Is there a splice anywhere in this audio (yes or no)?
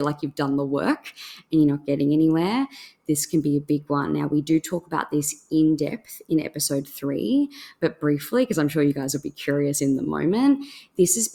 no